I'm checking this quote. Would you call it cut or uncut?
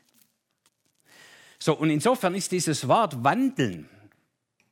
uncut